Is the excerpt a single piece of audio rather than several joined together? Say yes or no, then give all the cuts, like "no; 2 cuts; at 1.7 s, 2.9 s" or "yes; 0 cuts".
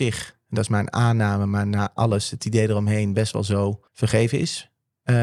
no; 1 cut; at 3.9 s